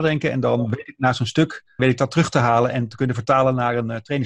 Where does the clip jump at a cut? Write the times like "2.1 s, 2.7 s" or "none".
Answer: 1.8 s